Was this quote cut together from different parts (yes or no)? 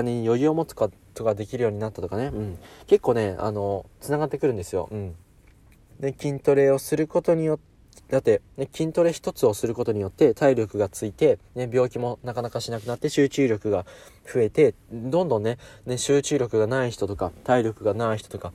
yes